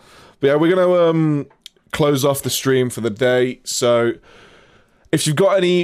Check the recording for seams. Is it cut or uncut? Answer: uncut